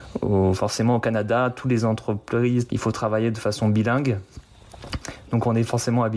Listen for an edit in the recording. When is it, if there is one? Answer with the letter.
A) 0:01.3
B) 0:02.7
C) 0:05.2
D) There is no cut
B